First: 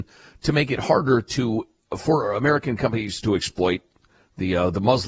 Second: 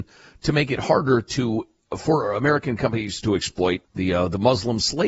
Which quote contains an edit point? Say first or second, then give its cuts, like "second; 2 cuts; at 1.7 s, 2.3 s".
second; 1 cut; at 3.8 s